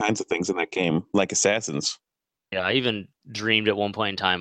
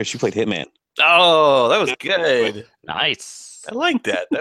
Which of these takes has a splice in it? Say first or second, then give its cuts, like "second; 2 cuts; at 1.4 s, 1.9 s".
first; 1 cut; at 2.5 s